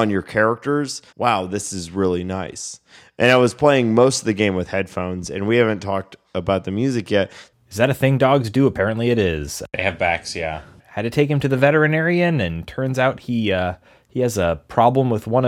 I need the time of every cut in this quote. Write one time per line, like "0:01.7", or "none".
0:01.1
0:07.5
0:10.8